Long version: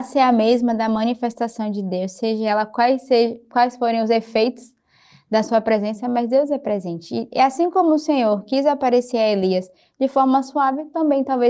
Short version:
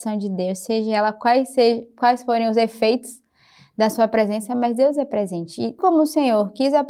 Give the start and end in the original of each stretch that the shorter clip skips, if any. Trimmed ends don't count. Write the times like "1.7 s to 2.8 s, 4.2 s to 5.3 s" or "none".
7.3 s to 7.7 s

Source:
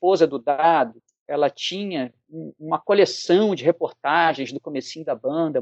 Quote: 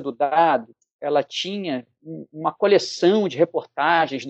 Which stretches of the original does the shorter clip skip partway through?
none

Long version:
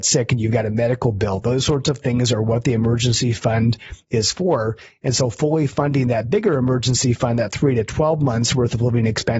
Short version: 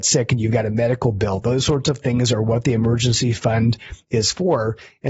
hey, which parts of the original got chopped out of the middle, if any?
none

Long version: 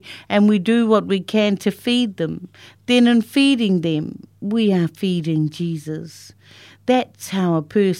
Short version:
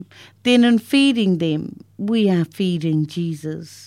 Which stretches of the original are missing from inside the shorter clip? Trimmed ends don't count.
none

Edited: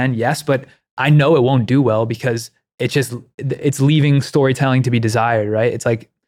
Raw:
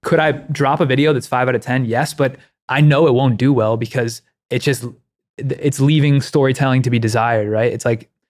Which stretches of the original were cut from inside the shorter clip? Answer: 5.0 s to 5.3 s

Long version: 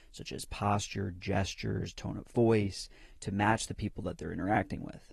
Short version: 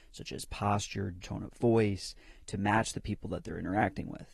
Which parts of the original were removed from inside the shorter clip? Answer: 1.2 s to 1.9 s

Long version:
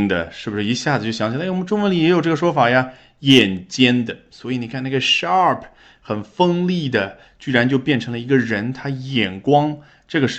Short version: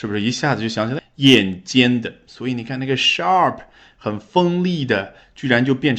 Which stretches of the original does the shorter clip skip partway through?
1.4 s to 3.0 s

